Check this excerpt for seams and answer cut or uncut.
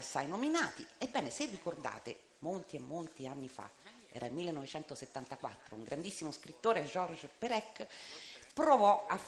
uncut